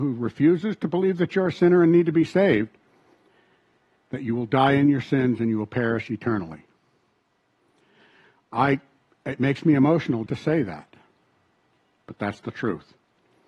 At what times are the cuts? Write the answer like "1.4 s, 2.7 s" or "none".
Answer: 10.3 s